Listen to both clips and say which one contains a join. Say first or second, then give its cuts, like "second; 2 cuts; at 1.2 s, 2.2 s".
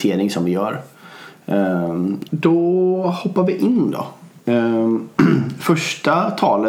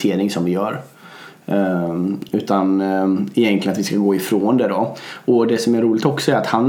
first; 2 cuts; at 2.3 s, 4.4 s